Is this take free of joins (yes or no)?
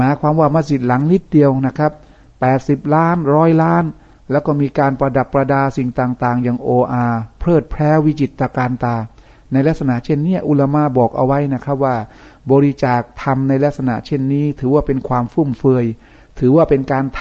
yes